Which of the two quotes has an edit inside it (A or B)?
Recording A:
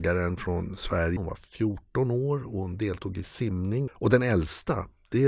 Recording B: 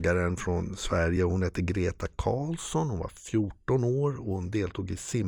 A